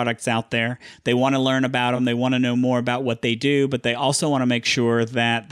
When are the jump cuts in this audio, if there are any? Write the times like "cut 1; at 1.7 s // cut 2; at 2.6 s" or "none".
none